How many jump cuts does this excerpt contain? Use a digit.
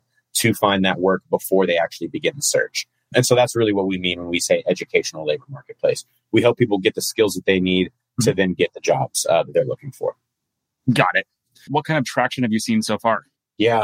1